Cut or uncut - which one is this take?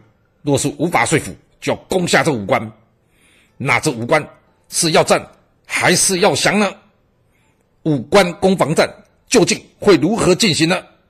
uncut